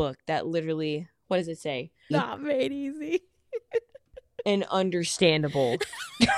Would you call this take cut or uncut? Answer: cut